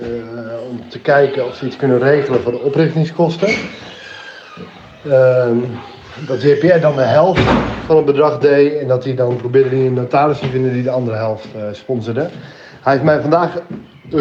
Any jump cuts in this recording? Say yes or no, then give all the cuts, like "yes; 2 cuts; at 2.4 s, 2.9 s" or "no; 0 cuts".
no; 0 cuts